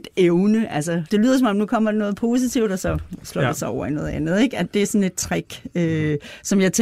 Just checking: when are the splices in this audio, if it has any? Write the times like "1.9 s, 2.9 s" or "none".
1.1 s